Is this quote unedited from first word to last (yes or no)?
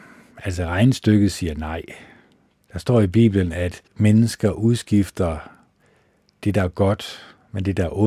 no